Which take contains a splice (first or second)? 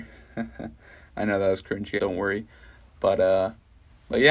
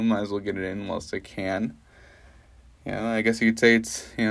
first